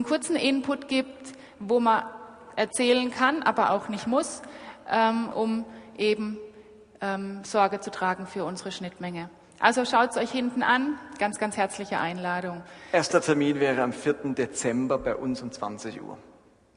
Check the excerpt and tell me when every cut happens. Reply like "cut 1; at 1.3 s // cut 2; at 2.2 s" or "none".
cut 1; at 5.3 s